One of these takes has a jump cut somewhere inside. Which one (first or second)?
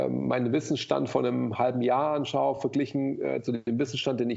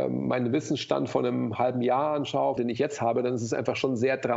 second